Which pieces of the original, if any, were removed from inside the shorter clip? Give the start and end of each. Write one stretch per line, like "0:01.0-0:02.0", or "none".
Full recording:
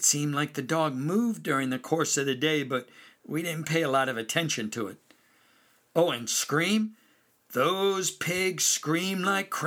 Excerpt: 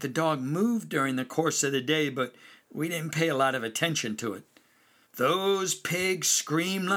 0:05.6-0:07.4